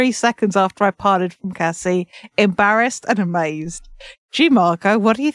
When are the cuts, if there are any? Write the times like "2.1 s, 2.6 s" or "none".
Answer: 4.1 s